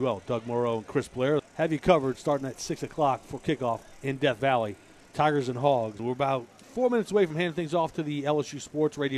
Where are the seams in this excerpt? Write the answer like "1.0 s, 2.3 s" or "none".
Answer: 1.4 s, 6.0 s